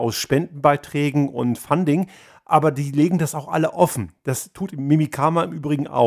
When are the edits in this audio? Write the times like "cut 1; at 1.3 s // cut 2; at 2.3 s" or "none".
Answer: none